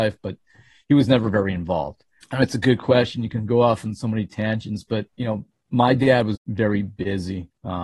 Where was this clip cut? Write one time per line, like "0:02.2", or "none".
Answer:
0:02.2
0:05.1
0:06.4